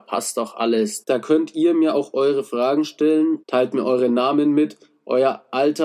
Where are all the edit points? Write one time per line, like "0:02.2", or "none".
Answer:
0:01.0
0:03.4